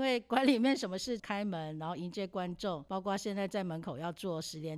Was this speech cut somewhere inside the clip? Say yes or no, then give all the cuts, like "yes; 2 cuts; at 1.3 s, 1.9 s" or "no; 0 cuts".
yes; 1 cut; at 1.2 s